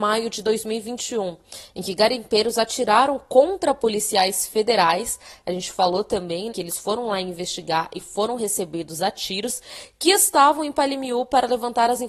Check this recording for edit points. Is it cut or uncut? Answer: cut